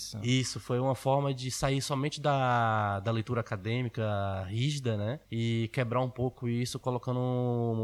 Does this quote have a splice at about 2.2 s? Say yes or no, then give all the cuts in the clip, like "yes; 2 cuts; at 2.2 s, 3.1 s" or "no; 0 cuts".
no; 1 cut; at 5.2 s